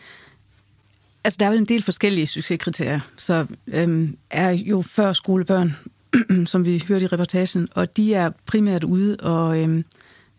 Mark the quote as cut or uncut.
cut